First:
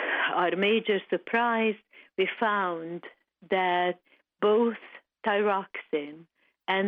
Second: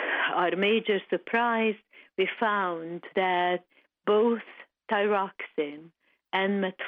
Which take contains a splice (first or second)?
second